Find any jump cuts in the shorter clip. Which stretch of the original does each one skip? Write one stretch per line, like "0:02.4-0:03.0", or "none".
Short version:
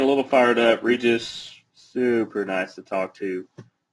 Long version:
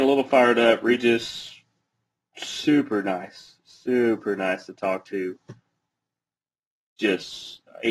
0:01.7-0:03.6